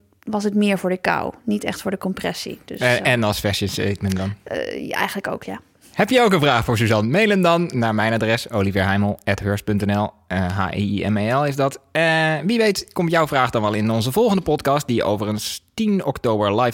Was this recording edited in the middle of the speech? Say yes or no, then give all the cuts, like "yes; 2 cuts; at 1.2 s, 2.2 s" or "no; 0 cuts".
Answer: no; 0 cuts